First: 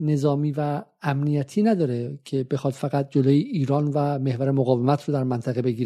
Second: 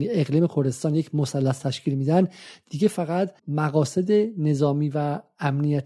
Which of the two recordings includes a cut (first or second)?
second